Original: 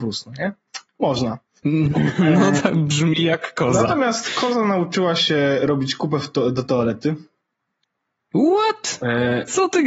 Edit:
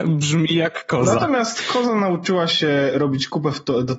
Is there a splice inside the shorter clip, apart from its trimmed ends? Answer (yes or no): no